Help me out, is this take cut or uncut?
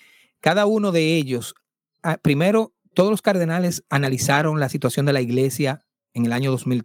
uncut